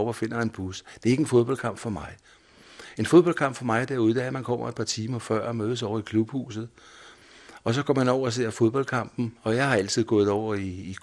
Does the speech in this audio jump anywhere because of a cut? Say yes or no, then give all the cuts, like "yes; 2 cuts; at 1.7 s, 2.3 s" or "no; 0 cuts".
no; 0 cuts